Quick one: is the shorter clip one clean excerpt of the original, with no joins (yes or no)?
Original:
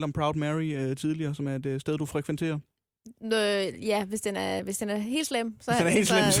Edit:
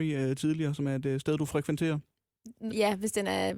no